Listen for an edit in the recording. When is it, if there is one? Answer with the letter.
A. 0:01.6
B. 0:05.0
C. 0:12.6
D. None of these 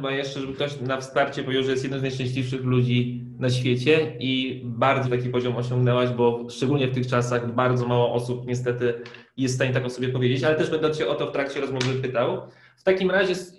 B